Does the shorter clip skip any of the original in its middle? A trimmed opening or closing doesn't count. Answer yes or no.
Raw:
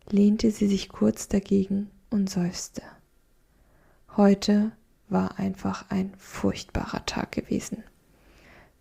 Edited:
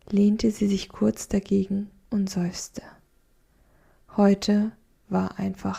no